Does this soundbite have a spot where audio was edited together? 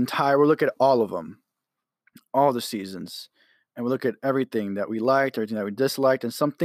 no; 0 cuts

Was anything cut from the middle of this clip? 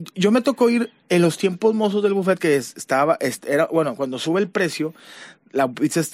no; 0 cuts

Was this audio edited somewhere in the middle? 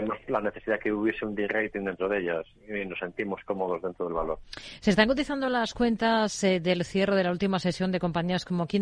no; 0 cuts

